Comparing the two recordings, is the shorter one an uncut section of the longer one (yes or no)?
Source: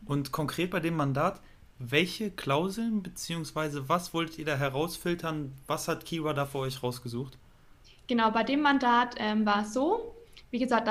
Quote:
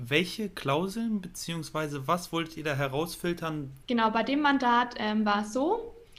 no